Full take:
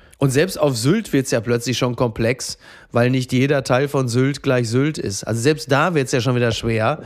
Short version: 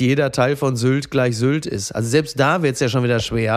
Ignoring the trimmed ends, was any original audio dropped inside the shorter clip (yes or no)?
no